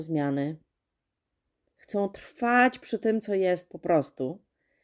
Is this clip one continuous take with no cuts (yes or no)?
yes